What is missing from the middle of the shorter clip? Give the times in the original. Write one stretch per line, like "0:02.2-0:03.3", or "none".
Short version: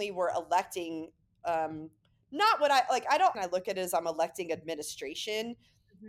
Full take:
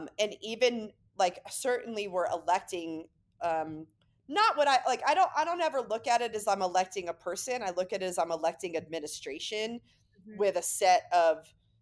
0:05.3-0:07.6